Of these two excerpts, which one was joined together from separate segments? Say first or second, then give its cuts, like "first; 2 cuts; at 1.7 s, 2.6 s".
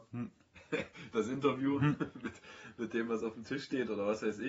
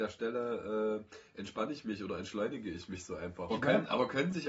second; 1 cut; at 3.5 s